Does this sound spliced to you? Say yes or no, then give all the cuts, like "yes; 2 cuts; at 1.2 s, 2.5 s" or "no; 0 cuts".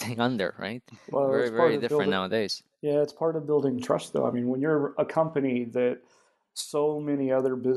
no; 0 cuts